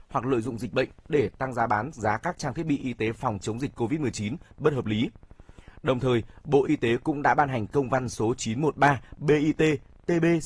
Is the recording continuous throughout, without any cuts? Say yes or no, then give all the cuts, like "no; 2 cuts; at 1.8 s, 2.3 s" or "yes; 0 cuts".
yes; 0 cuts